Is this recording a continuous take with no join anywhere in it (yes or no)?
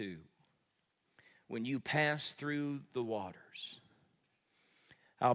yes